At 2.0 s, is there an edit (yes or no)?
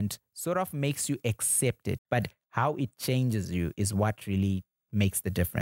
yes